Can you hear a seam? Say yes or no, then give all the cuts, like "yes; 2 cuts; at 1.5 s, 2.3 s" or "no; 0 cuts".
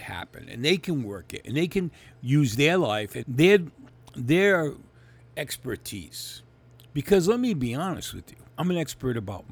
yes; 2 cuts; at 3.2 s, 8.5 s